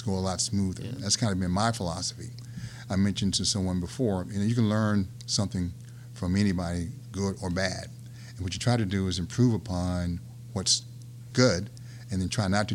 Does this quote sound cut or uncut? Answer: uncut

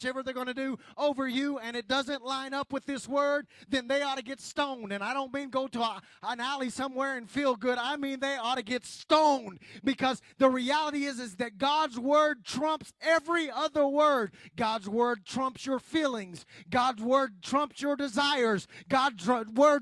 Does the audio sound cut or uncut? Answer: uncut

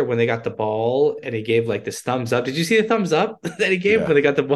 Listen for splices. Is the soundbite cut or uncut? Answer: uncut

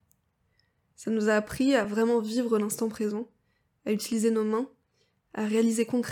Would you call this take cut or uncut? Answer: uncut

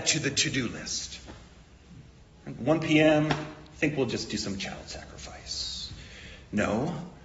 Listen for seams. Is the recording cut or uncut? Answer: uncut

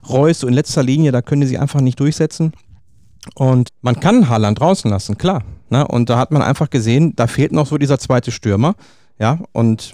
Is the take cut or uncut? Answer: cut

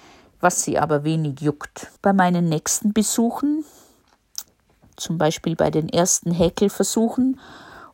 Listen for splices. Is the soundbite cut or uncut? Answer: cut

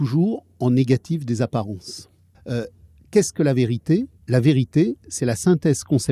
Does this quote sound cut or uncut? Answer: cut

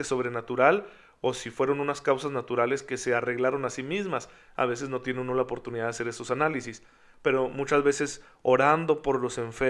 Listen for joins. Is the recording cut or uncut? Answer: uncut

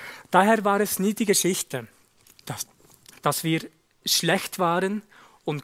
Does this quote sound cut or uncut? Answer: uncut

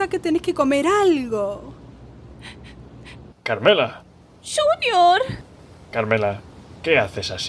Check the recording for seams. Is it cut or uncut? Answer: cut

